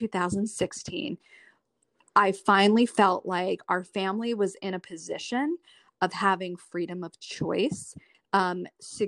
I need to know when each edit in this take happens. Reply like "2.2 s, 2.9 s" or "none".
8.1 s